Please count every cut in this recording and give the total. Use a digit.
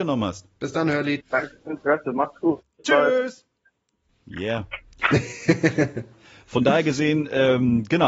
2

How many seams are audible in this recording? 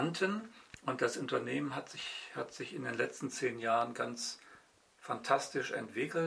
0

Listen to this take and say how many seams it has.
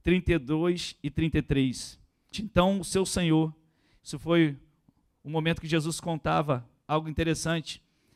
1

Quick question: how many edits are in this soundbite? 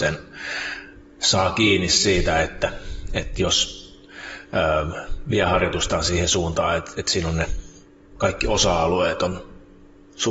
0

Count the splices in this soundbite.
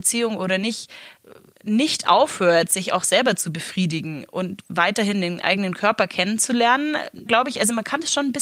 1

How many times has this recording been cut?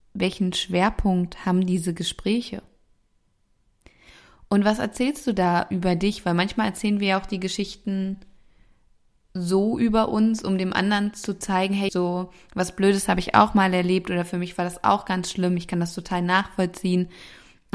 1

